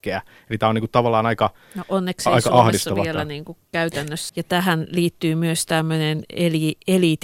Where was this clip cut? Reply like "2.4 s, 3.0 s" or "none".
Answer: 4.3 s